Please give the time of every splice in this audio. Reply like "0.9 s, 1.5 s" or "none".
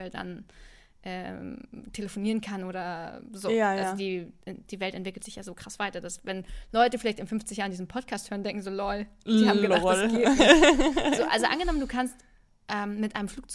4.4 s